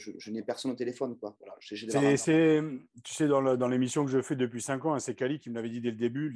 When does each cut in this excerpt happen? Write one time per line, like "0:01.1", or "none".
none